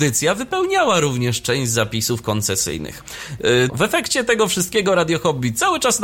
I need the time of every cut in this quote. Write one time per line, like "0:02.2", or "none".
0:03.7